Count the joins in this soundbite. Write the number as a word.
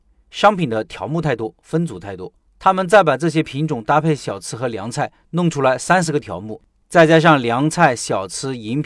one